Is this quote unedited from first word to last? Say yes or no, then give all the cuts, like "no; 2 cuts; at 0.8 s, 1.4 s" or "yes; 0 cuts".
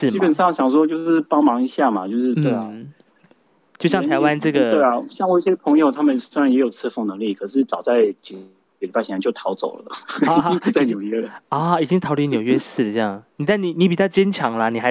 yes; 0 cuts